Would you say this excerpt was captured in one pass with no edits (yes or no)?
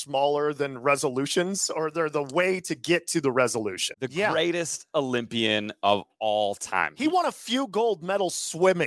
no